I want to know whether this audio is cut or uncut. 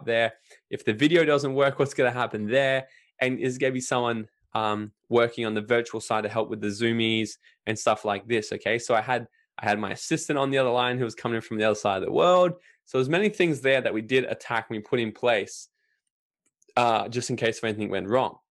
uncut